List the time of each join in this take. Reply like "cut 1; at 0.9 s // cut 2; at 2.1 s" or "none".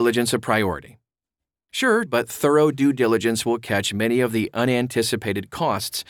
cut 1; at 2.1 s